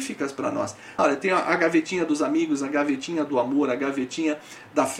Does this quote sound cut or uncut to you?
cut